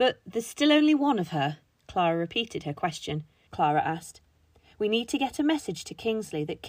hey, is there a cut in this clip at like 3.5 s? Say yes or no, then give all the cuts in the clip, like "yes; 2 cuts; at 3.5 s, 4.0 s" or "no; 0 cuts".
yes; 1 cut; at 3.5 s